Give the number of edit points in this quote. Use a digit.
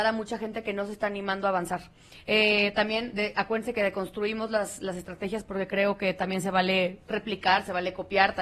0